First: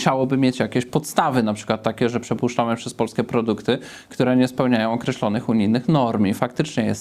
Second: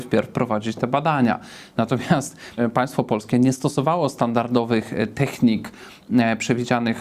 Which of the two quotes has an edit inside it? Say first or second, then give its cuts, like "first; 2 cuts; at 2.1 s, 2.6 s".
second; 1 cut; at 2.6 s